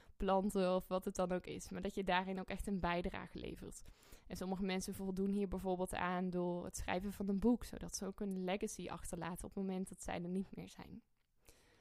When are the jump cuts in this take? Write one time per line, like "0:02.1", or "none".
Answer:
none

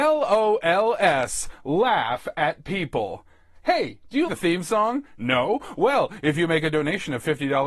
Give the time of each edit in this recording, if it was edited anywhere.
0:04.3

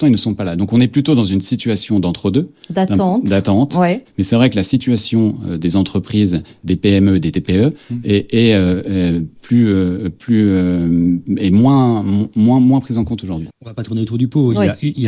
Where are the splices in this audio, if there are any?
0:04.1
0:13.5

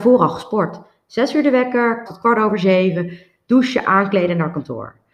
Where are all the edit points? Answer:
0:02.1

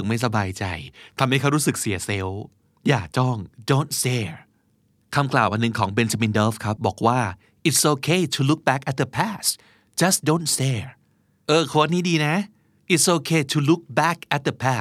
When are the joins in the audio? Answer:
0:06.8

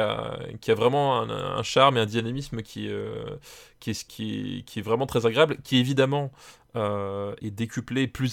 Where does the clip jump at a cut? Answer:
0:04.1
0:07.4

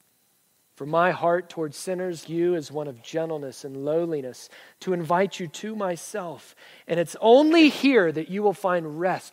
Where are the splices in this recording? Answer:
0:02.2
0:04.6

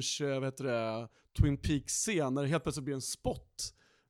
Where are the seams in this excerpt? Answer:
none

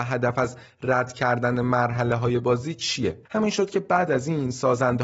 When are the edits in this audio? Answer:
0:03.3

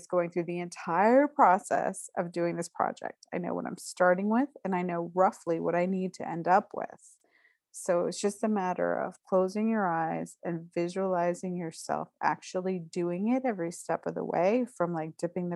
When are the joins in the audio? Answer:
none

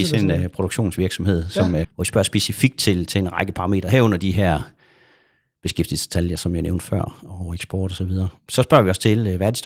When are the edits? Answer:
0:01.8

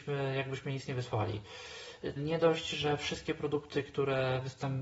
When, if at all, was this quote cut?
0:02.2

